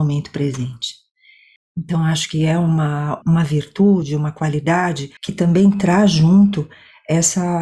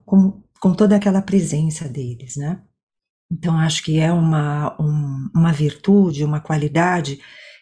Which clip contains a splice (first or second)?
first